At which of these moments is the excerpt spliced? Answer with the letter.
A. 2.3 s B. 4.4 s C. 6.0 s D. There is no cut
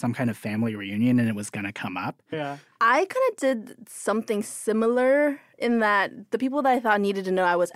A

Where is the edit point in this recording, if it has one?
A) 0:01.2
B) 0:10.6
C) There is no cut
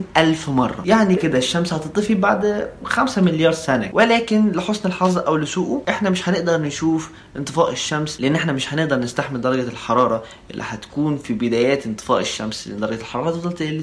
A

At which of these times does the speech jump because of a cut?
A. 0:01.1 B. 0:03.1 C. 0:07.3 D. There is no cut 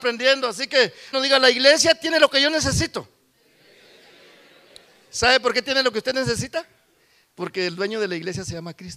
A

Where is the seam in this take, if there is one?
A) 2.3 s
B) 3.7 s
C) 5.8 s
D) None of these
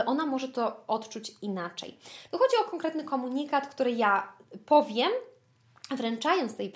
A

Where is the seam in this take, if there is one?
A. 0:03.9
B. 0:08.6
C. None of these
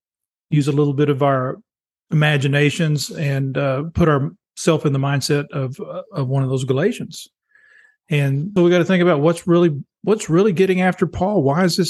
B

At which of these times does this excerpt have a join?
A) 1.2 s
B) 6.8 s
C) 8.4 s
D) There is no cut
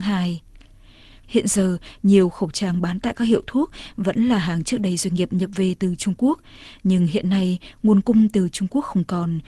A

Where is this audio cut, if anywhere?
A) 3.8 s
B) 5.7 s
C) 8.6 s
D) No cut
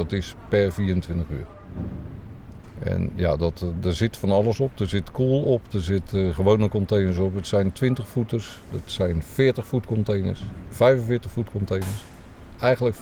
A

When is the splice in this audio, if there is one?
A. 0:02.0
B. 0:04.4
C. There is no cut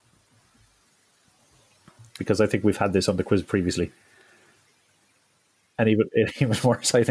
C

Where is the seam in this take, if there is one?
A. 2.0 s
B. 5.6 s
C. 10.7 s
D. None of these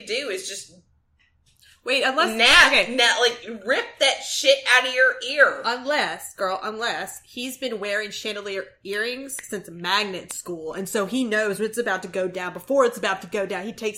D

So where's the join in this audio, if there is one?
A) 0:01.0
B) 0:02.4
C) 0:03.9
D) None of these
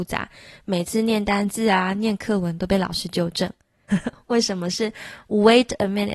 C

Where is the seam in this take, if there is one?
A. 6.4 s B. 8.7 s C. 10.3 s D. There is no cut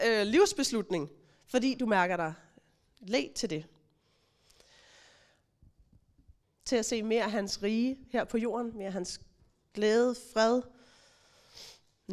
A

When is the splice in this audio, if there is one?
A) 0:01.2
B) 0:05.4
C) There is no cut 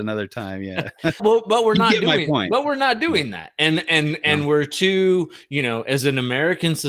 A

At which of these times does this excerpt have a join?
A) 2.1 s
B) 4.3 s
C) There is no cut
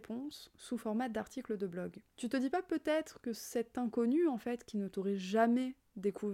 A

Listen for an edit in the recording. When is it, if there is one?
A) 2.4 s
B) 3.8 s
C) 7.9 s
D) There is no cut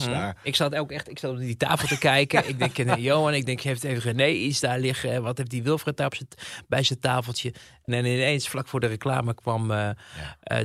C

